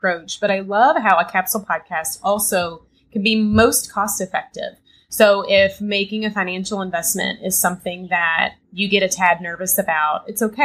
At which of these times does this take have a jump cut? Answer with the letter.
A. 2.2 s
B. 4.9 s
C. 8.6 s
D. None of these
C